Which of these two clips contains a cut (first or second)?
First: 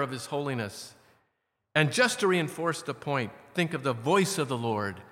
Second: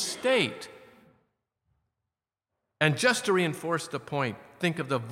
second